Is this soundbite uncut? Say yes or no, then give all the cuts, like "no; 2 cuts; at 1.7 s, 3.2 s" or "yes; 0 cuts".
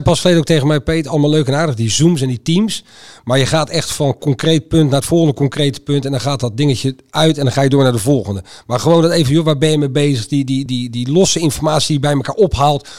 no; 1 cut; at 10.7 s